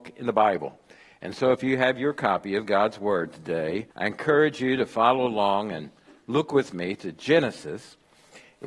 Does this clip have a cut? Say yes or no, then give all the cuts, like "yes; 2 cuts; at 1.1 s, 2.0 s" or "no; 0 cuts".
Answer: yes; 1 cut; at 3.9 s